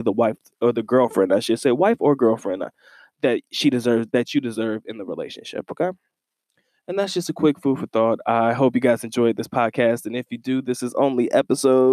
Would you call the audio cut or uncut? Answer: uncut